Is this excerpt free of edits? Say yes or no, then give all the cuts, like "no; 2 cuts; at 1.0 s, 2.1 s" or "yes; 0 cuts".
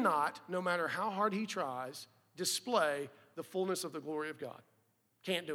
yes; 0 cuts